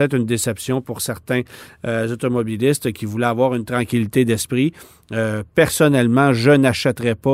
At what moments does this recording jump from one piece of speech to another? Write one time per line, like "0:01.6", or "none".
none